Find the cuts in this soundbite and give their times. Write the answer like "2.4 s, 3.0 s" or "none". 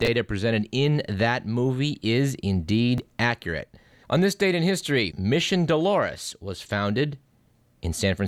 4.0 s, 5.1 s